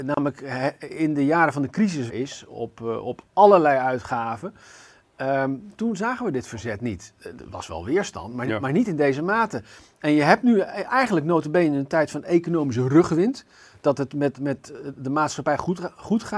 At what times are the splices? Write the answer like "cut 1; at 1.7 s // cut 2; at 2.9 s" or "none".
cut 1; at 2.1 s